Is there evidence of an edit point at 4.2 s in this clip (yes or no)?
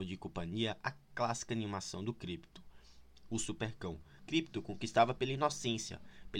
yes